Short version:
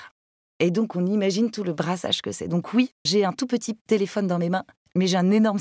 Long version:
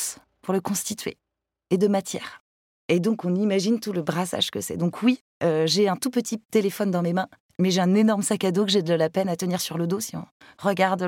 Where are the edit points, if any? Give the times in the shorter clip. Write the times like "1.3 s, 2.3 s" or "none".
3.1 s